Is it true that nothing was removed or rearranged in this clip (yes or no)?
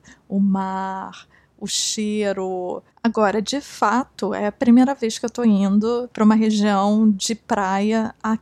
no